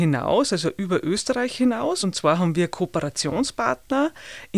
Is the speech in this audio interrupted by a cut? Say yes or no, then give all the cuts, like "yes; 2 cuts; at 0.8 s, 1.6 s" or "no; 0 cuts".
no; 0 cuts